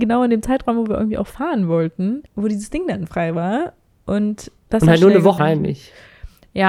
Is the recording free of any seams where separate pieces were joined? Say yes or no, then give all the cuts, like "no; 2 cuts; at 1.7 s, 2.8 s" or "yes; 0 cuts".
no; 2 cuts; at 2.3 s, 5.4 s